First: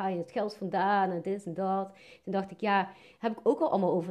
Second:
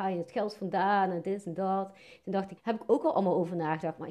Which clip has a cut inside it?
second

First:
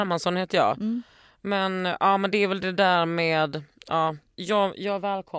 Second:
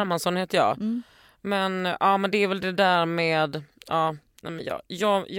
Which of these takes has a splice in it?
first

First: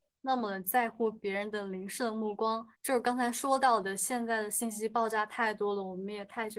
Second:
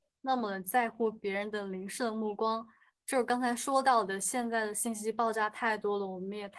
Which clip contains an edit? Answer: first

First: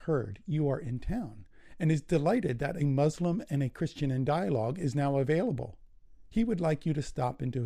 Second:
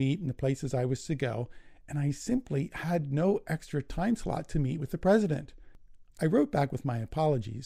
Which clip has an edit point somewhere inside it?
second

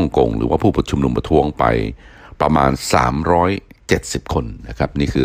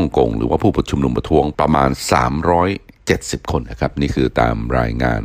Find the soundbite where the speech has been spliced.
second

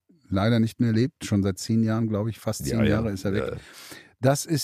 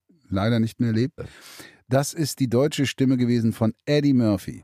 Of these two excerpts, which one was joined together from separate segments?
second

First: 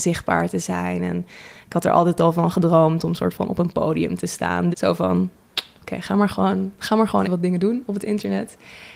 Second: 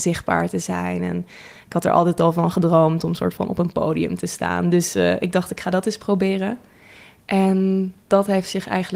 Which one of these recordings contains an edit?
first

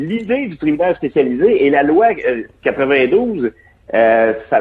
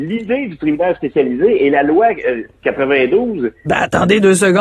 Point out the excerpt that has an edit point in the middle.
second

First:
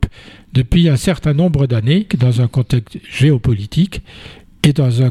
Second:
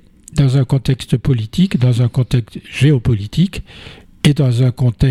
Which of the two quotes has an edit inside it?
first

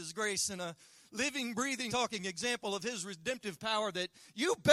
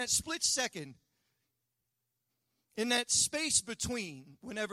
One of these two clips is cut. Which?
first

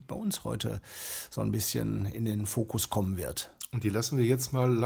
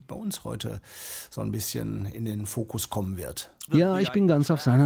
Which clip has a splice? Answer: second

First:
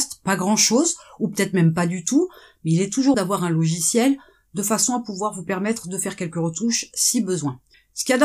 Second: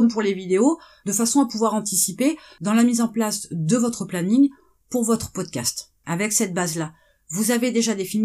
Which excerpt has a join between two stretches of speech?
first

